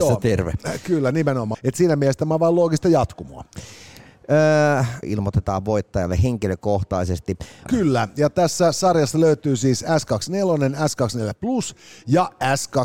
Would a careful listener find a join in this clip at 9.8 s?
no; 3 cuts; at 1.5 s, 5.0 s, 7.7 s

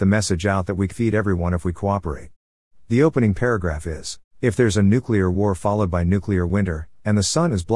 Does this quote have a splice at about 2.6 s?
no; 2 cuts; at 0.9 s, 4.3 s

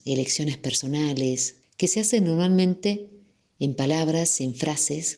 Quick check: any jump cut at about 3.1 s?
no; 1 cut; at 1.6 s

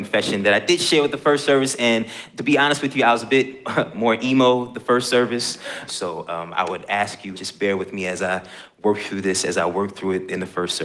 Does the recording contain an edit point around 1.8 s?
no; 2 cuts; at 5.9 s, 7.3 s

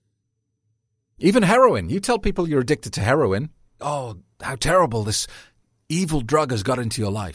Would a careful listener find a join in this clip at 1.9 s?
no; 1 cut; at 3.8 s

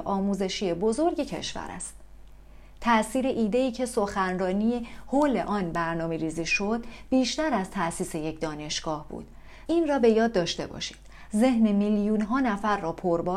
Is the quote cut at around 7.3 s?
no; 2 cuts; at 9.7 s, 11.3 s

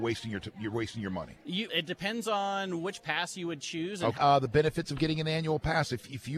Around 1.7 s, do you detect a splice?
yes; 2 cuts; at 1.7 s, 4.2 s

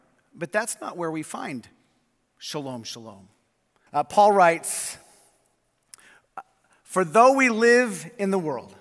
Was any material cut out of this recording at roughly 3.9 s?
yes; 1 cut; at 3.9 s

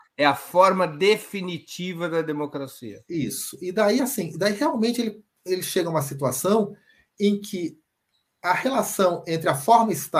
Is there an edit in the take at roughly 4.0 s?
no; 0 cuts

